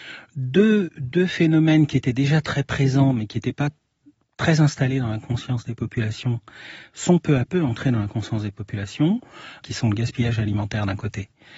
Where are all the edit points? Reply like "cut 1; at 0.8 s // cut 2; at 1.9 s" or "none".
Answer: none